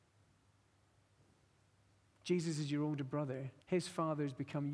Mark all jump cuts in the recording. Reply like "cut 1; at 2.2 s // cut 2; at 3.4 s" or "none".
cut 1; at 3.6 s